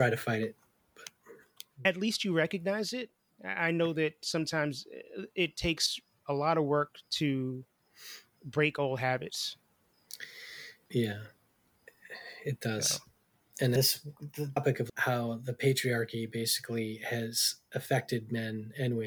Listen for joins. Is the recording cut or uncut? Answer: uncut